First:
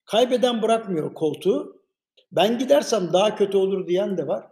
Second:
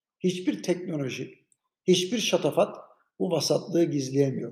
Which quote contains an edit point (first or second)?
first